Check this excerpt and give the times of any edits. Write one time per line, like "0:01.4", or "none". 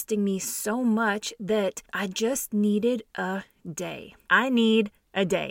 0:04.2